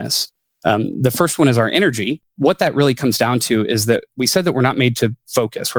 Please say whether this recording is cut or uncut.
uncut